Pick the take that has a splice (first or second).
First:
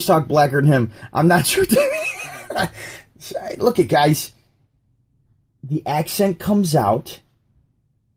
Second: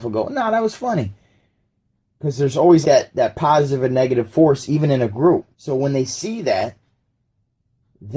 second